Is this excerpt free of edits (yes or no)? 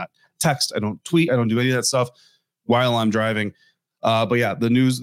yes